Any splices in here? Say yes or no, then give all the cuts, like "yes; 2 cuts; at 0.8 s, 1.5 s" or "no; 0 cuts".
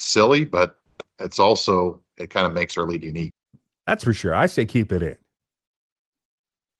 no; 0 cuts